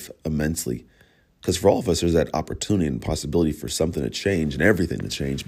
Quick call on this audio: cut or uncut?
cut